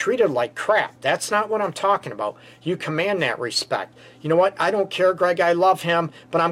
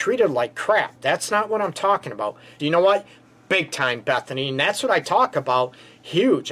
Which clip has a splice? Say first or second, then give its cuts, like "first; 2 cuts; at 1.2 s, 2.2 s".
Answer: second; 1 cut; at 2.6 s